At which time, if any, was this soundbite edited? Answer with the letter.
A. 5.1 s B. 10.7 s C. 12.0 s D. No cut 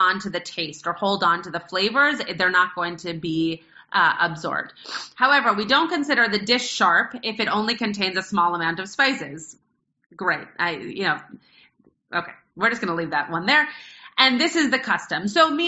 D